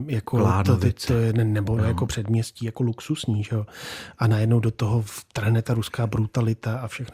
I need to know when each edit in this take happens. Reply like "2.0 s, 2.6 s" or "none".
1.8 s